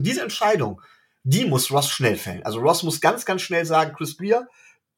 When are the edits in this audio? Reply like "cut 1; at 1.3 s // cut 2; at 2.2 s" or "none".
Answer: none